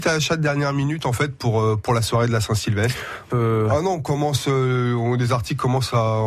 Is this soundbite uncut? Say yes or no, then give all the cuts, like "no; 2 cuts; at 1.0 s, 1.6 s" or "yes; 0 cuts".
no; 1 cut; at 3.3 s